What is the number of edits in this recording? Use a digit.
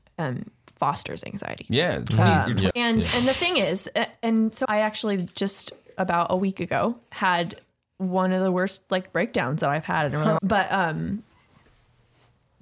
3